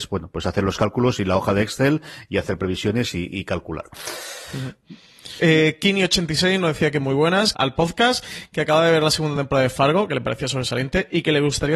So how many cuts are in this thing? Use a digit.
2